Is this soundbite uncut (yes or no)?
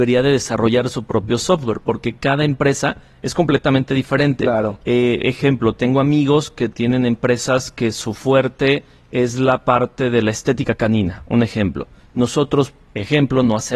yes